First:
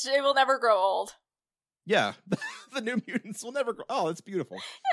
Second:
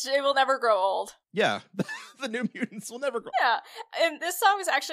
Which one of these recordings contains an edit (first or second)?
second